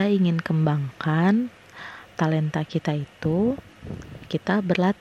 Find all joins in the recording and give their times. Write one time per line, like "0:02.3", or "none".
0:02.1